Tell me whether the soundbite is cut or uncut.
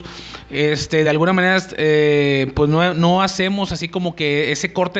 uncut